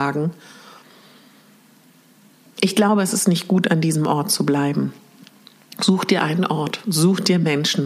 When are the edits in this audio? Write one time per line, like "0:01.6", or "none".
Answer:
none